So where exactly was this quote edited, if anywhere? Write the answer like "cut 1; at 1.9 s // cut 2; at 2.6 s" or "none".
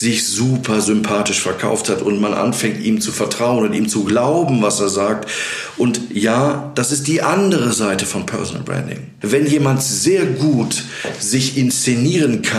cut 1; at 9.2 s